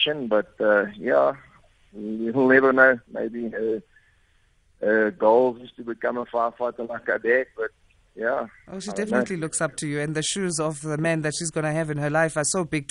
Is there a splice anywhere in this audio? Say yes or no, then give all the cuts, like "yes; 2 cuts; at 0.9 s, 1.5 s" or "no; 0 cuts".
no; 0 cuts